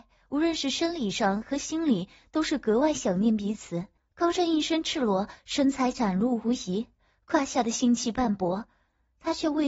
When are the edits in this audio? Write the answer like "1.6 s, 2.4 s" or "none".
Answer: 4.0 s